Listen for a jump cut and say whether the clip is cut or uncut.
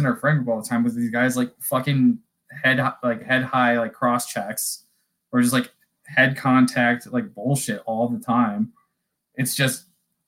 uncut